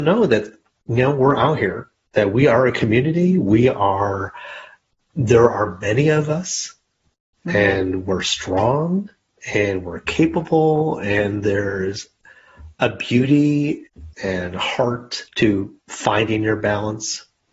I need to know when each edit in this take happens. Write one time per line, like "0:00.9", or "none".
0:14.1
0:15.3